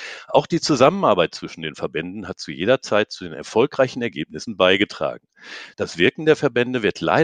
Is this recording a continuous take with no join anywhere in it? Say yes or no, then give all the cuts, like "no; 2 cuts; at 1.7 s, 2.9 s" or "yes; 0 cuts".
yes; 0 cuts